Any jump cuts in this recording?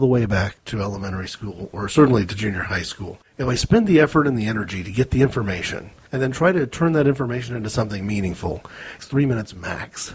yes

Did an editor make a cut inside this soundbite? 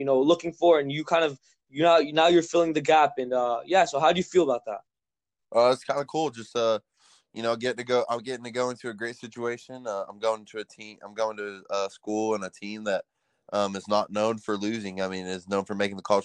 no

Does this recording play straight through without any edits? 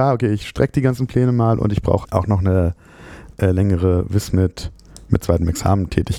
no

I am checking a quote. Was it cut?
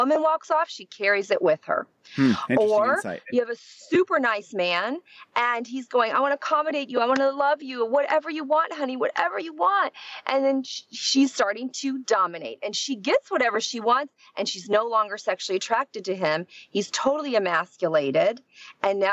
no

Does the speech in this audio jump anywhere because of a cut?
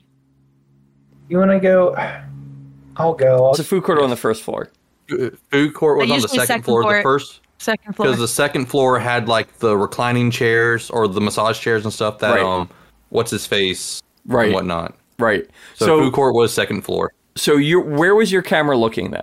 yes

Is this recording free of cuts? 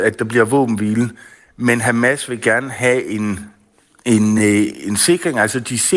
yes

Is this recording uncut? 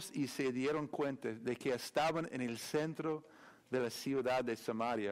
yes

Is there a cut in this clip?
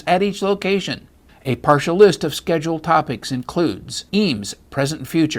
yes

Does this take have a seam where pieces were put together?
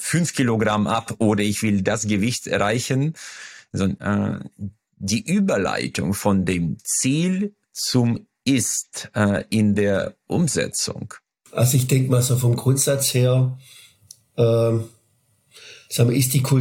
yes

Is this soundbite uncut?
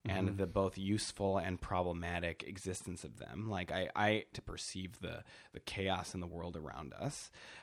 no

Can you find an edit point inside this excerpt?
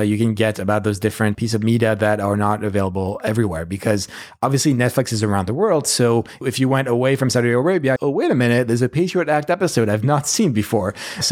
yes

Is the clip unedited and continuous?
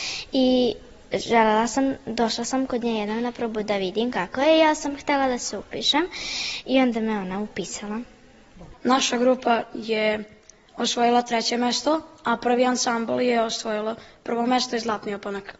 no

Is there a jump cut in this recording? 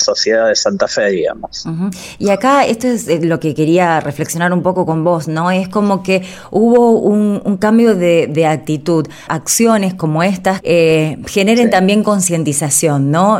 yes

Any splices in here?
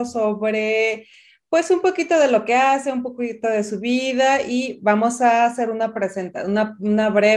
no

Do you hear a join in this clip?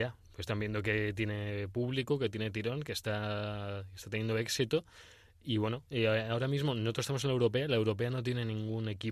no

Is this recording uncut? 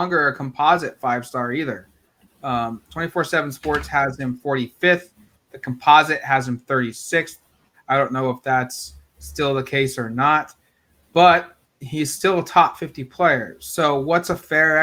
no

